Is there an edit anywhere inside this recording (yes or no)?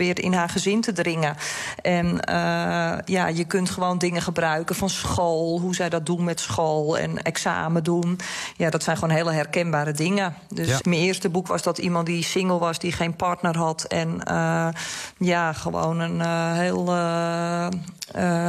yes